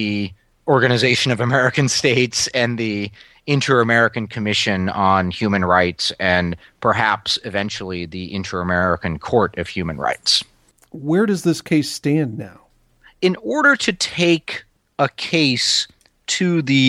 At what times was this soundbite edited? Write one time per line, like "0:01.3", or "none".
none